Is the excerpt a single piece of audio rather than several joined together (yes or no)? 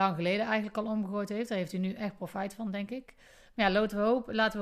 yes